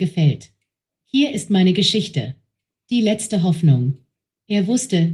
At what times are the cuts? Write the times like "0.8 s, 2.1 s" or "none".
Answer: none